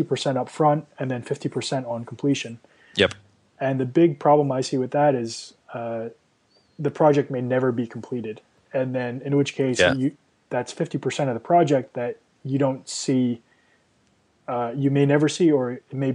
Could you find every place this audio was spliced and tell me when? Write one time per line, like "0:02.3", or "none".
none